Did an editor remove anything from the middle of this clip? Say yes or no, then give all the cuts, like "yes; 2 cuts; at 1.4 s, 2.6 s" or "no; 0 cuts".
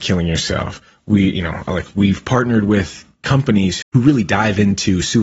yes; 1 cut; at 3.8 s